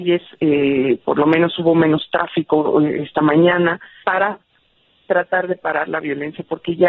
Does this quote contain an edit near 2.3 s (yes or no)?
no